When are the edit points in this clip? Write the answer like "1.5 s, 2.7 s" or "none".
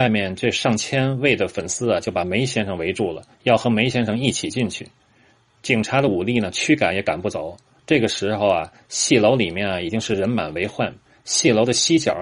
7.8 s